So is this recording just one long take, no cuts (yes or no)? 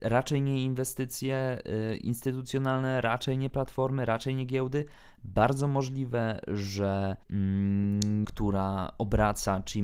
no